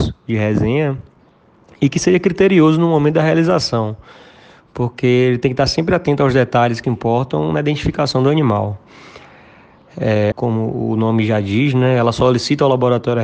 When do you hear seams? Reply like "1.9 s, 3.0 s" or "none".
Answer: 6.8 s, 10.3 s